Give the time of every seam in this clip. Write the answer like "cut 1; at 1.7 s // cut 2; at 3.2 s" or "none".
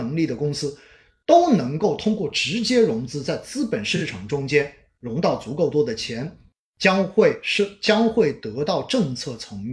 cut 1; at 6.6 s